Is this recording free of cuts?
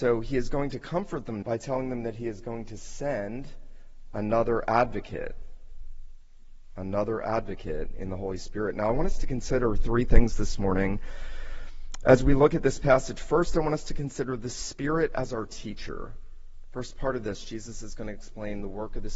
no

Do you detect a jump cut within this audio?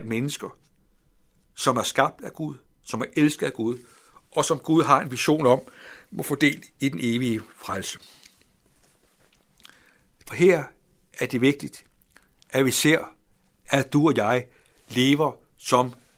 yes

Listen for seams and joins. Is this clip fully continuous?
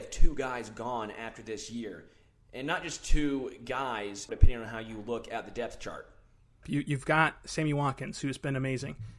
no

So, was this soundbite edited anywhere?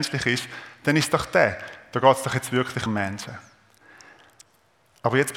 yes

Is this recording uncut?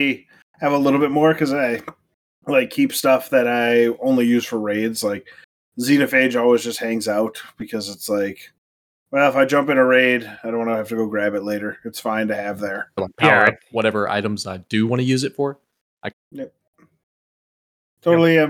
no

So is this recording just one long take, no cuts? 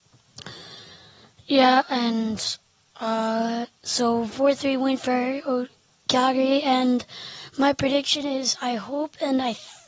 yes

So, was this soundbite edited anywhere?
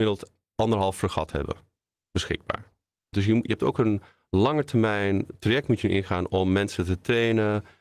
yes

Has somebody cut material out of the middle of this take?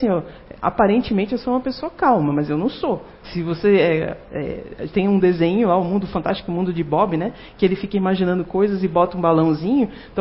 yes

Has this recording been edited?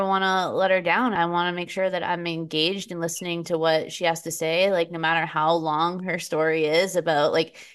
yes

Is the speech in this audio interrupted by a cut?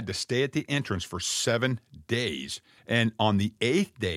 yes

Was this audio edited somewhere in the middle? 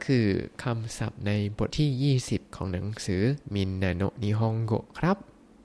yes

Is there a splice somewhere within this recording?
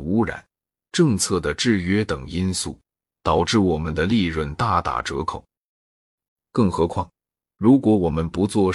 yes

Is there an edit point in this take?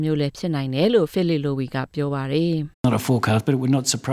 yes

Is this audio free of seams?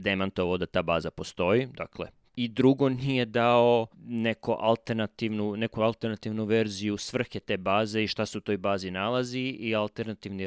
no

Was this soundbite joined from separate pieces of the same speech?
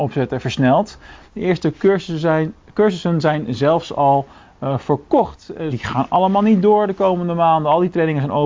yes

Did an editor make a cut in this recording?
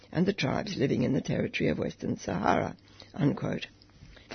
no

